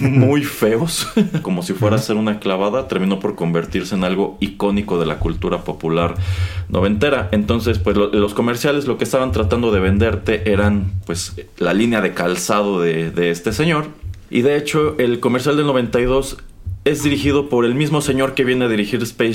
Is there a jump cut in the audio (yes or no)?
yes